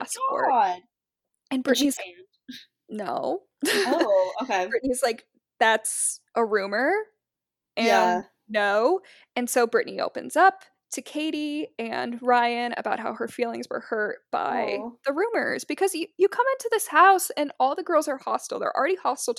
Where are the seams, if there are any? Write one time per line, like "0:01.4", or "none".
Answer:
0:02.0
0:06.3